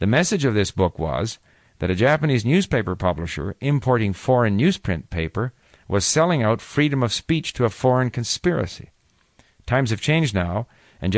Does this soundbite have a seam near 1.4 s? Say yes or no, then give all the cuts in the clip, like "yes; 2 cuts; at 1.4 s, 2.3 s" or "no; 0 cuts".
no; 0 cuts